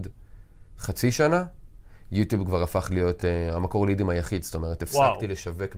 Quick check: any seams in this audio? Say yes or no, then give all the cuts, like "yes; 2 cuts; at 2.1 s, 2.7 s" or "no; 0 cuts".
no; 0 cuts